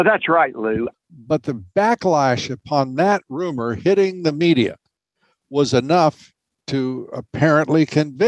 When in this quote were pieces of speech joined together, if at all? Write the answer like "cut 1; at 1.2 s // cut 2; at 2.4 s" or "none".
cut 1; at 0.9 s